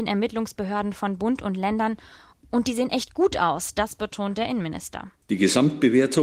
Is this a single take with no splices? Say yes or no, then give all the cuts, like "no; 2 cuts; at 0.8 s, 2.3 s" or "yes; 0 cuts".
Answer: yes; 0 cuts